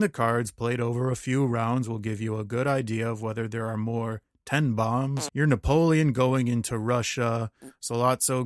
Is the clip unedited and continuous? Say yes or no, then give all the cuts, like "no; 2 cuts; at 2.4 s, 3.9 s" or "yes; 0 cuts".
no; 1 cut; at 5.3 s